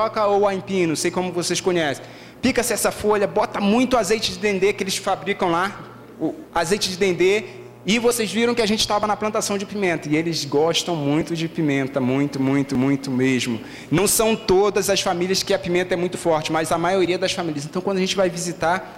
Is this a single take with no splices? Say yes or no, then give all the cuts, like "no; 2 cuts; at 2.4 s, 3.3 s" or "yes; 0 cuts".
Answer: no; 1 cut; at 6.4 s